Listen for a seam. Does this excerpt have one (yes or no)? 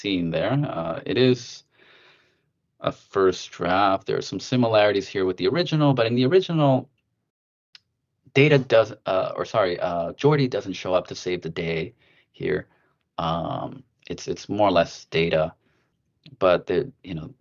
no